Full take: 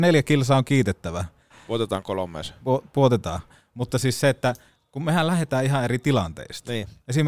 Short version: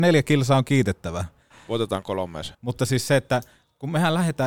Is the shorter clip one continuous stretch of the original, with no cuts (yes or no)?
no